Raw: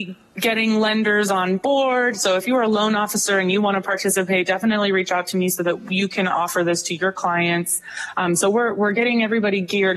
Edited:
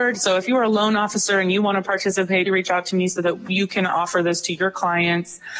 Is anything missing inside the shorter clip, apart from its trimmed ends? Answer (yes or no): yes